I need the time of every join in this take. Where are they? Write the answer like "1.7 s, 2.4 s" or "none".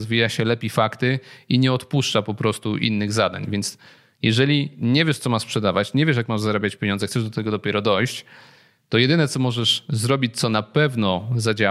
none